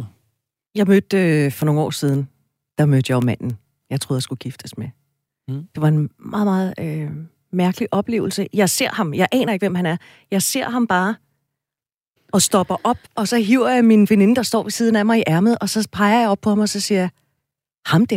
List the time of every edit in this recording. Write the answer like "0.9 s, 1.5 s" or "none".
13.1 s